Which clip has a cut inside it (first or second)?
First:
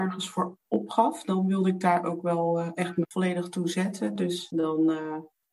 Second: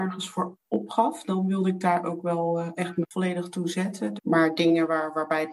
second